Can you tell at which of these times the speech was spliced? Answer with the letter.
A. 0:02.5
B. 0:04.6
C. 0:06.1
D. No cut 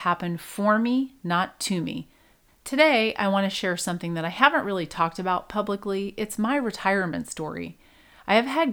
A